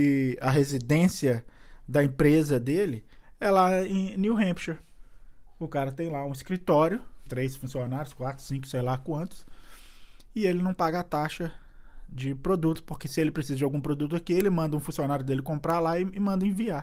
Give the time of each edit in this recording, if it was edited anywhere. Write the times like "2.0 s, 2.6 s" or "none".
7.3 s